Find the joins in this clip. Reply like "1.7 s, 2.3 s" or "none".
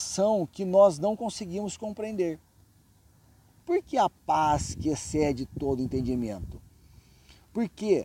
3.6 s